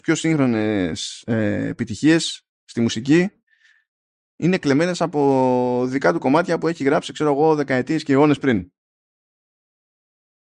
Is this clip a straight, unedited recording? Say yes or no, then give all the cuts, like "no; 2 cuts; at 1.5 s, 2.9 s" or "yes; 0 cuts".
no; 1 cut; at 2.5 s